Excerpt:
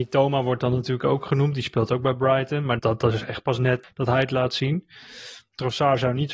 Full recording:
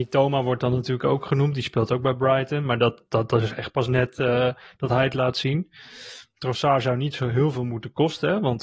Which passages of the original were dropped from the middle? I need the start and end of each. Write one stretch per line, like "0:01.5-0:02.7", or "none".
0:02.8-0:03.1
0:04.1-0:04.7